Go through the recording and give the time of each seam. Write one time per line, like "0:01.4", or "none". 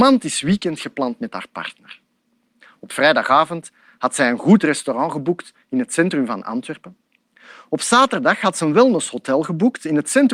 none

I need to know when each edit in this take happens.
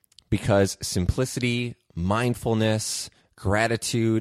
none

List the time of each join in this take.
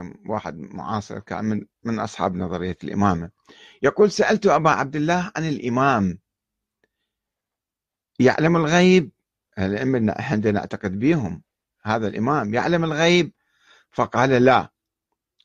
none

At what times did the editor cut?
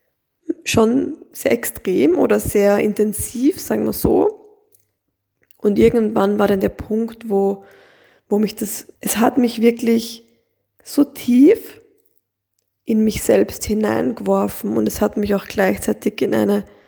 0:08.9

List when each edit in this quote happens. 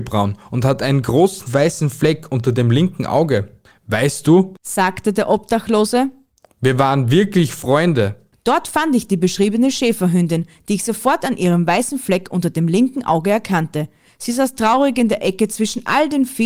0:08.3

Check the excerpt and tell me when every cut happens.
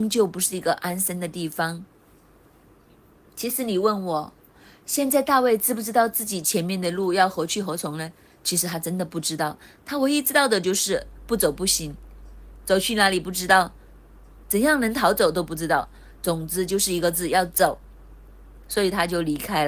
0:12.6

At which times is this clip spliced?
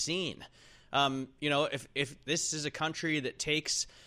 none

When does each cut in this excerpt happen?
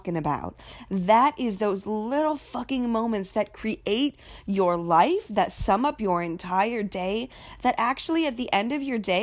none

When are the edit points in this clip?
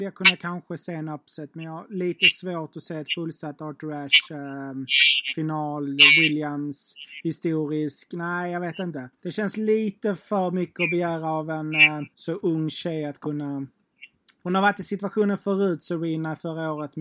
0:09.2
0:12.1
0:14.4

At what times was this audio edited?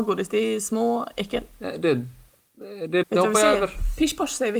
0:03.0

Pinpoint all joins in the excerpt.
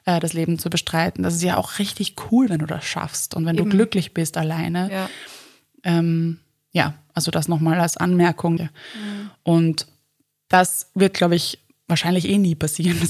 0:08.6

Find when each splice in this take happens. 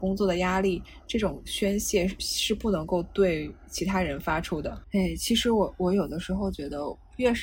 0:04.8

